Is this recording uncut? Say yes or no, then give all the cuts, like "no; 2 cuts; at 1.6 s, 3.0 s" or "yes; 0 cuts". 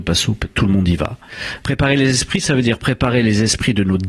no; 1 cut; at 1.6 s